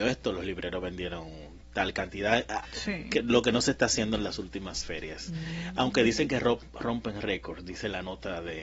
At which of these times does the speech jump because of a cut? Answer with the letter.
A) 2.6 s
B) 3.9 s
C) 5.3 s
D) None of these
A